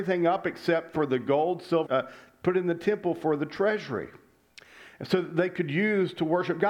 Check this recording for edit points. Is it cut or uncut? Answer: cut